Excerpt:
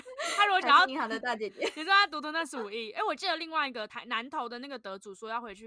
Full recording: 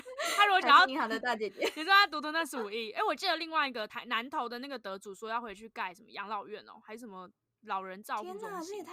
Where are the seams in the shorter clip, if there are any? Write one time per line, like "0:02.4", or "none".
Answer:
none